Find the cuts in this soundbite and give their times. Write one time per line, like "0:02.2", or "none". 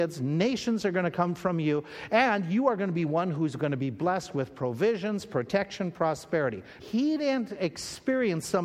0:06.8